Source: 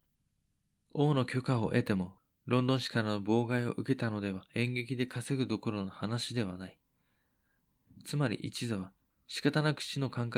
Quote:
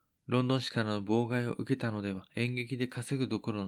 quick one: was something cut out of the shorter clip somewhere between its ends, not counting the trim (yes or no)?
no